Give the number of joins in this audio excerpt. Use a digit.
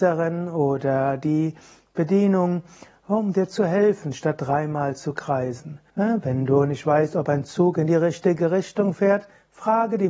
1